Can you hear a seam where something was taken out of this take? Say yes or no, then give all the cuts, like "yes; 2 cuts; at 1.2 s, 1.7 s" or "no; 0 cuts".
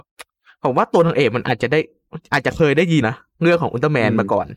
yes; 1 cut; at 3.0 s